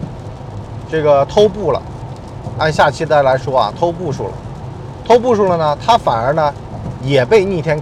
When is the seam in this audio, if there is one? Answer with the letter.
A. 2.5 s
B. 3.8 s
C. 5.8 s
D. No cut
D